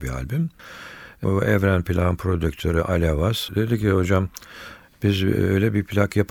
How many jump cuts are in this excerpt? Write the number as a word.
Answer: one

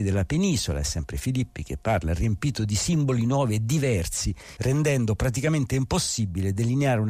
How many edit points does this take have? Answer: one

